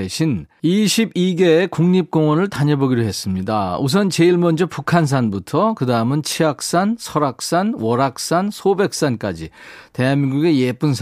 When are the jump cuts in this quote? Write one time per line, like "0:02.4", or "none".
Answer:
none

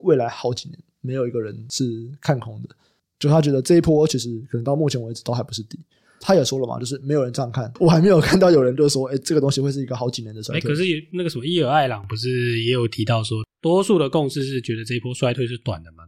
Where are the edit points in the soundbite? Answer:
none

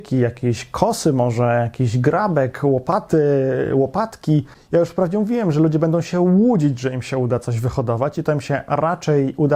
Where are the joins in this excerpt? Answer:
none

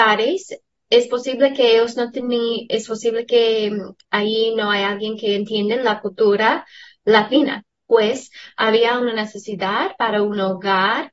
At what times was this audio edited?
0:02.7
0:07.7

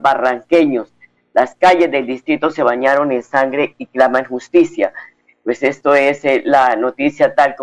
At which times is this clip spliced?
none

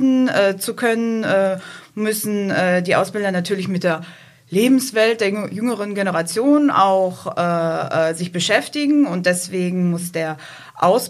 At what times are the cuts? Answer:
none

